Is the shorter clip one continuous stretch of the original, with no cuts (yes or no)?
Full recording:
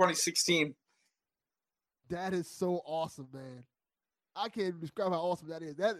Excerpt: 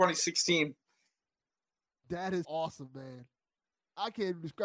no